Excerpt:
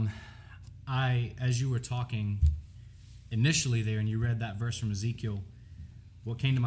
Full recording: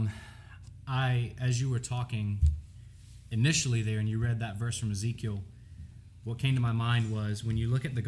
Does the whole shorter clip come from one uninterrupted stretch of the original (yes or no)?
yes